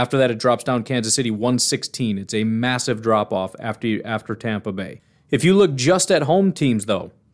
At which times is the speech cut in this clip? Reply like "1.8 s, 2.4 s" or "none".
none